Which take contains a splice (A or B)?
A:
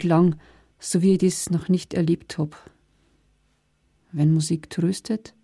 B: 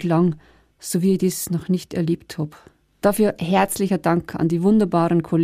B